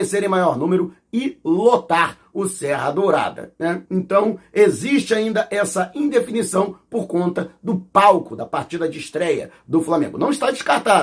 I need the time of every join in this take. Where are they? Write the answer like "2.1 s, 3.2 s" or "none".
none